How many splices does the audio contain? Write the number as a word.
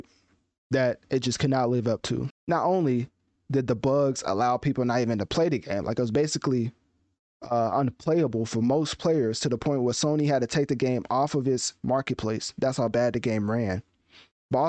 one